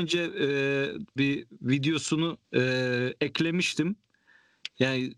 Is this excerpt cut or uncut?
cut